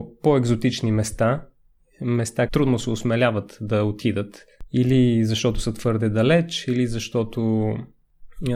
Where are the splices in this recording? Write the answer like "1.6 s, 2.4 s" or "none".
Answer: 2.5 s